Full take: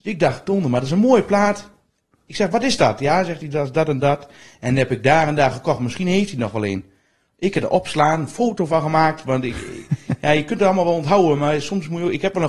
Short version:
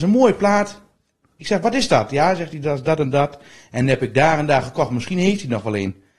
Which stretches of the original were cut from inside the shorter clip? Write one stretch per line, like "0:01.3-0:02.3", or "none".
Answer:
none